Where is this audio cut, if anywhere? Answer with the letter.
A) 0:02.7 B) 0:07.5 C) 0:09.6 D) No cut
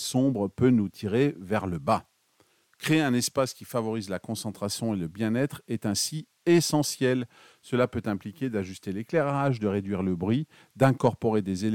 D